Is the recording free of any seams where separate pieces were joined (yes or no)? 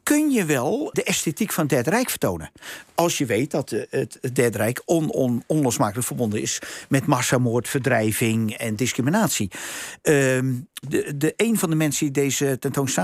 no